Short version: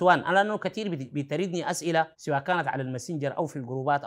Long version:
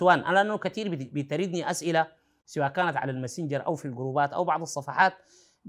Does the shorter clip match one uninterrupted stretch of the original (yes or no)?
no